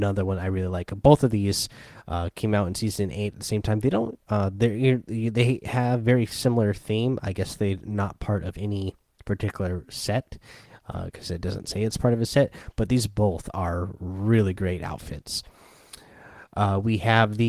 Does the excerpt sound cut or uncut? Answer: uncut